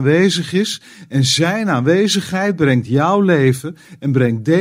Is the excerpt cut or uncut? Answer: uncut